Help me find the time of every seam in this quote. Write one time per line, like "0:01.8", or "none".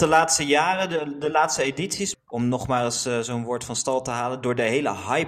0:02.1

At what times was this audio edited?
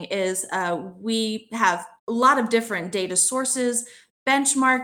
0:02.0

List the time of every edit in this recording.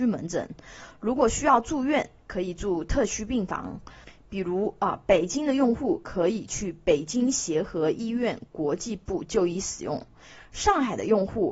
none

